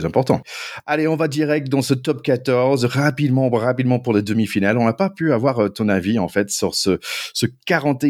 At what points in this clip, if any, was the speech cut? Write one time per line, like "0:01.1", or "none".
none